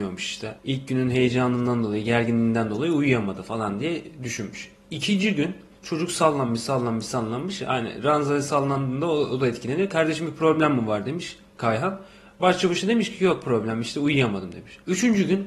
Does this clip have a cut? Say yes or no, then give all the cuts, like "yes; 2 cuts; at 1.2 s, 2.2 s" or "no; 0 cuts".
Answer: no; 0 cuts